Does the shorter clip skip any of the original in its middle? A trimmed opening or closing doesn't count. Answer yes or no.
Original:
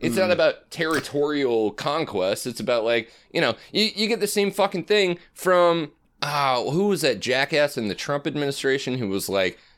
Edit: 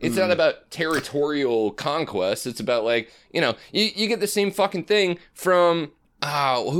no